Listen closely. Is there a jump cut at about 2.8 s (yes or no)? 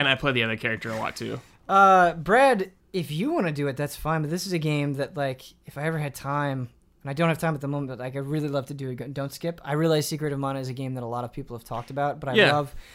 yes